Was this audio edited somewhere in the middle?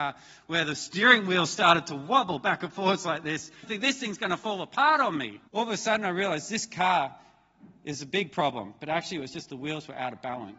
yes; 2 cuts; at 3.6 s, 5.5 s

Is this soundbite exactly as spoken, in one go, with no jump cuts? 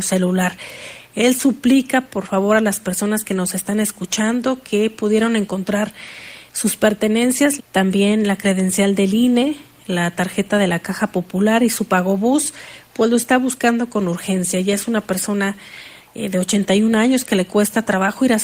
no; 1 cut; at 7.6 s

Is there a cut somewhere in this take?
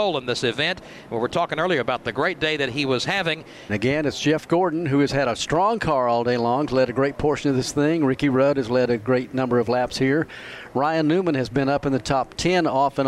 yes; 1 cut; at 3.7 s

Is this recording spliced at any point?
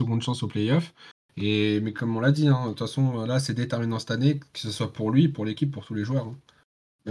no; 0 cuts

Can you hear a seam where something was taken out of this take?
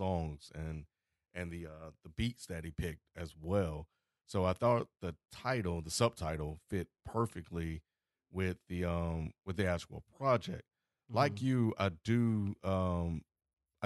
no; 0 cuts

